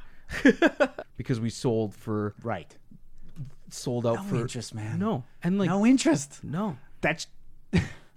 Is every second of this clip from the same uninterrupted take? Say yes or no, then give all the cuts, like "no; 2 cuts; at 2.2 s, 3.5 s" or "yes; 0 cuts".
no; 2 cuts; at 1.0 s, 7.0 s